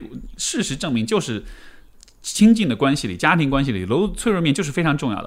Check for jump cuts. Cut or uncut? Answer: uncut